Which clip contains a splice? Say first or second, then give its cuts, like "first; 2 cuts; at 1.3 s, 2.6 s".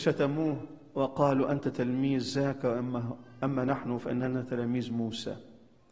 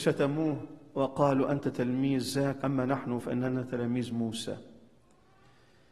second; 1 cut; at 2.6 s